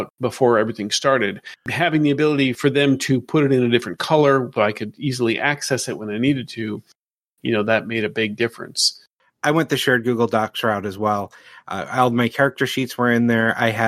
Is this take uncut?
no; 1 cut; at 4.6 s

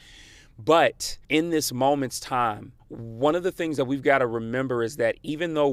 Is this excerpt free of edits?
no; 2 cuts; at 1.2 s, 2.8 s

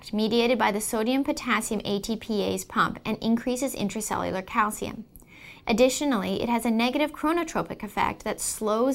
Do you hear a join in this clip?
yes; 1 cut; at 5.6 s

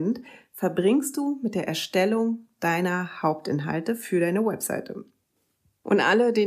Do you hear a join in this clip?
no; 0 cuts

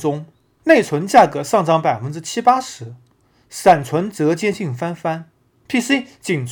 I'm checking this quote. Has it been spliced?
yes; 1 cut; at 5.6 s

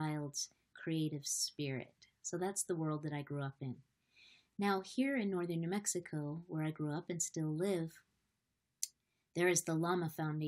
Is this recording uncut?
yes; 0 cuts

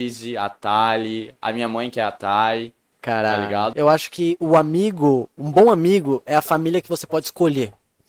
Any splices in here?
yes; 1 cut; at 3.7 s

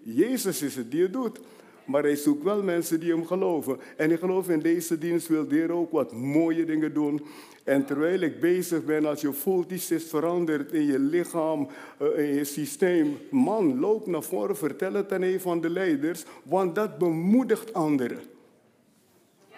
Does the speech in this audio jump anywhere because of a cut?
no; 0 cuts

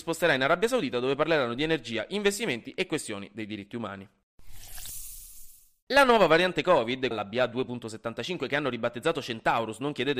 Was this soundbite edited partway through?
yes; 2 cuts; at 5.8 s, 7.1 s

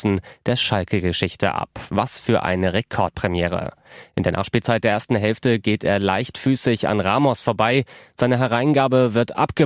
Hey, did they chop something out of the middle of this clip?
no; 0 cuts

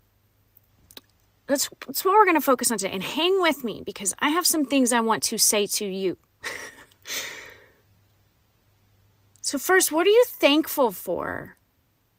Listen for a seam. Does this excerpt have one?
no; 0 cuts

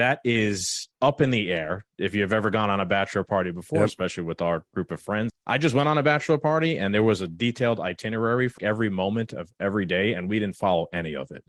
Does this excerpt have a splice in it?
yes; 2 cuts; at 5.3 s, 8.6 s

